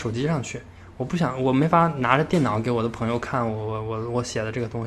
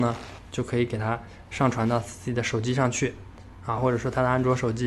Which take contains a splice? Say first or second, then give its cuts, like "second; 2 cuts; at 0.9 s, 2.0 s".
second; 1 cut; at 3.8 s